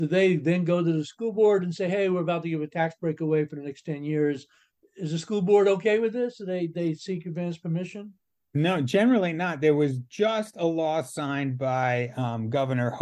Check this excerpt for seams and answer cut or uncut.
uncut